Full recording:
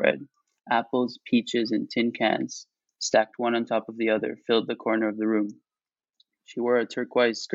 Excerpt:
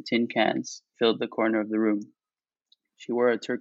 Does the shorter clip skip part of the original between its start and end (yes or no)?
yes